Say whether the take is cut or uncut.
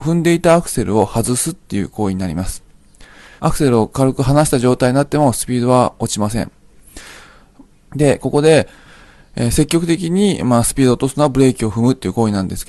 cut